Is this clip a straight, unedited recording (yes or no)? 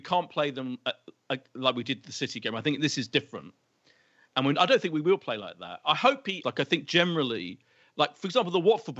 no